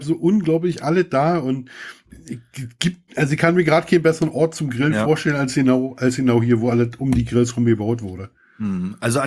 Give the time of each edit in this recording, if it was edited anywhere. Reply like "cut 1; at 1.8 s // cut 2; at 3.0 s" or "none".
cut 1; at 3.1 s